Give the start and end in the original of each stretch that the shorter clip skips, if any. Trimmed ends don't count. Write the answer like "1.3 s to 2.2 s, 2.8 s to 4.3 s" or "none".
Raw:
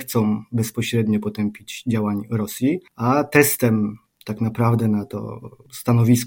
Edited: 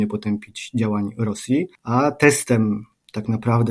none